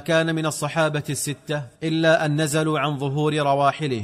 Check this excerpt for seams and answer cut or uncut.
cut